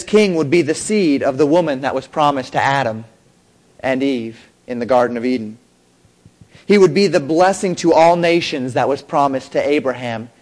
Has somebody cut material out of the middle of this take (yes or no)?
no